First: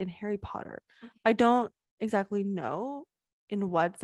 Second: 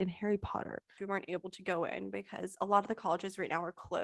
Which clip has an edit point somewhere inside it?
second; 1 cut; at 1.0 s

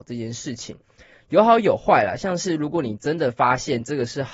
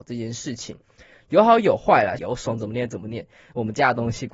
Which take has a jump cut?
second; 1 cut; at 2.2 s

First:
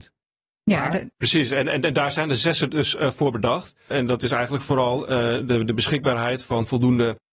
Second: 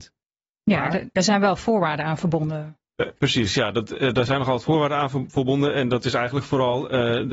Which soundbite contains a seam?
first; 2 cuts; at 1.1 s, 3.9 s

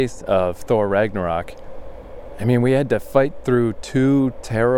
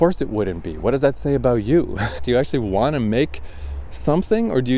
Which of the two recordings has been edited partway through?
second; 1 cut; at 2.2 s

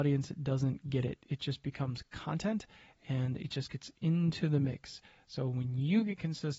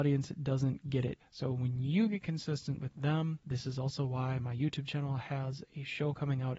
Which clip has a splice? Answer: second; 1 cut; at 1.2 s

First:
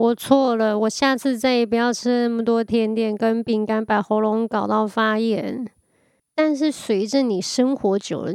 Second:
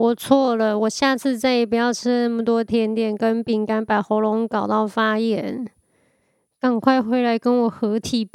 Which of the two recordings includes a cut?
first; 1 cut; at 6.2 s

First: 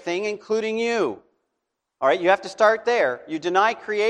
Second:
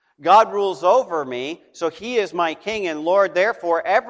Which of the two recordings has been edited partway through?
first; 1 cut; at 1.8 s

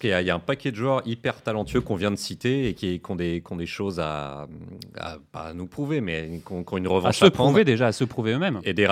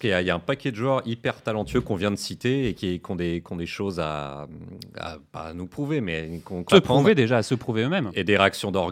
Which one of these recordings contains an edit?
second; 1 cut; at 6.7 s

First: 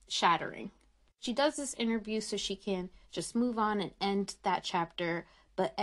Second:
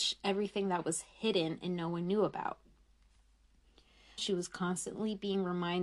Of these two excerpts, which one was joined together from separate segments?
second; 1 cut; at 4.2 s

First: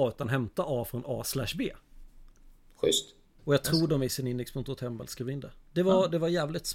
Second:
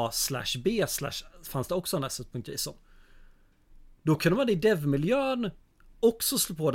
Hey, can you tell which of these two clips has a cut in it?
first; 1 cut; at 3.4 s

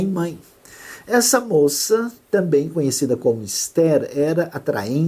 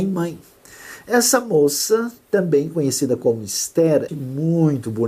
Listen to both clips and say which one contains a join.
second; 1 cut; at 4.1 s

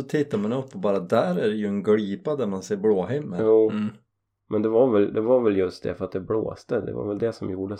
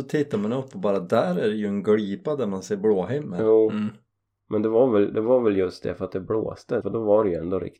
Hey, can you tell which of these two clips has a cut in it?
second; 1 cut; at 6.8 s

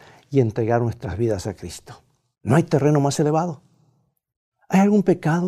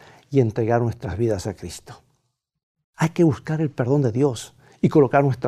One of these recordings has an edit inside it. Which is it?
first; 1 cut; at 2.3 s

